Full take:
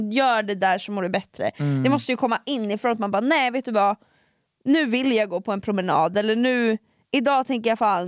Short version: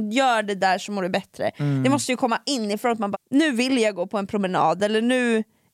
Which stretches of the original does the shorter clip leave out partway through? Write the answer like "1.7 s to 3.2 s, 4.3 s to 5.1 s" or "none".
3.1 s to 4.5 s